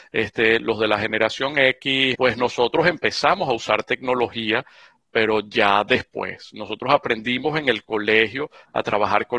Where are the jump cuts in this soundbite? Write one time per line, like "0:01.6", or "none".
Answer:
0:02.1